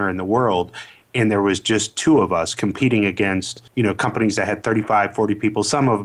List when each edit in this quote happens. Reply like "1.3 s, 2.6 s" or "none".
3.7 s